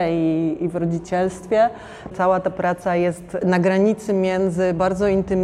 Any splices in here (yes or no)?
yes